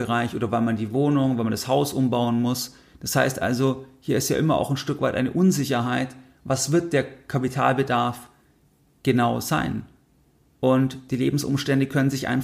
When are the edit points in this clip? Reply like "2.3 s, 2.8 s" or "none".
10.5 s